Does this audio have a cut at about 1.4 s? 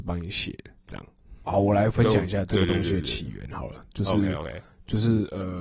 yes; 1 cut; at 1.4 s

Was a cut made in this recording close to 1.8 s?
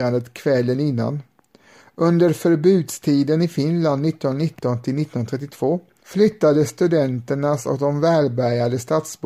no; 1 cut; at 6.0 s

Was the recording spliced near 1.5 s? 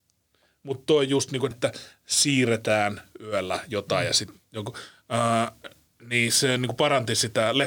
yes; 1 cut; at 1.5 s

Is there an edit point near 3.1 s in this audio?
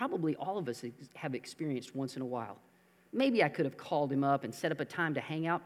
yes; 1 cut; at 3.1 s

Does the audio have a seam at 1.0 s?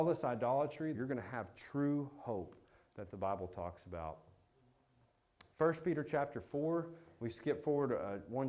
yes; 1 cut; at 1.0 s

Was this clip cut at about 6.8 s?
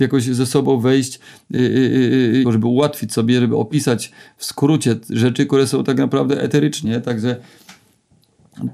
yes; 2 cuts; at 2.4 s, 6.8 s

